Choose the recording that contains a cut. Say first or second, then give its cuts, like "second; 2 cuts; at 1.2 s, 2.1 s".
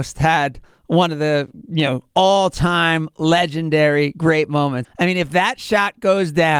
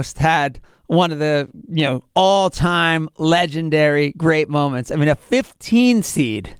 first; 1 cut; at 4.8 s